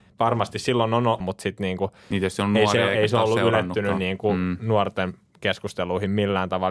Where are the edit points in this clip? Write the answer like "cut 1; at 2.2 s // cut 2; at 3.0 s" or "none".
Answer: cut 1; at 1.2 s